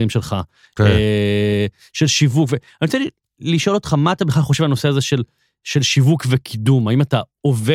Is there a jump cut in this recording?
no; 0 cuts

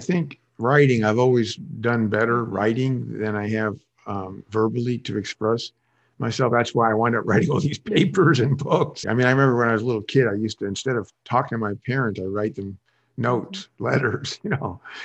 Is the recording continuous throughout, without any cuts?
no; 1 cut; at 9.0 s

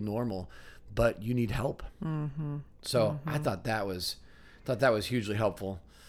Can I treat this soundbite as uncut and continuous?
no; 1 cut; at 2.7 s

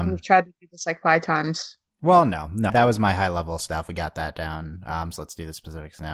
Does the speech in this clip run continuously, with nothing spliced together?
no; 1 cut; at 2.7 s

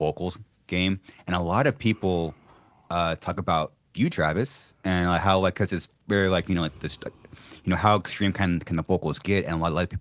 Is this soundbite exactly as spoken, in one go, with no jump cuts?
yes; 0 cuts

